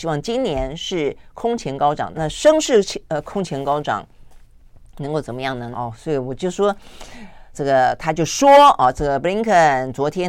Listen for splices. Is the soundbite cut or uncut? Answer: cut